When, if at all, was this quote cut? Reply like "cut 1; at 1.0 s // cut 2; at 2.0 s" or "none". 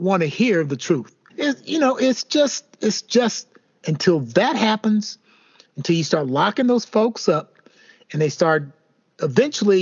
cut 1; at 1.3 s